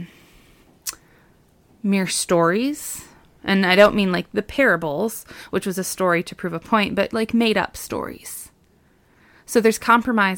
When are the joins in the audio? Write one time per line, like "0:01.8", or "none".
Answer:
none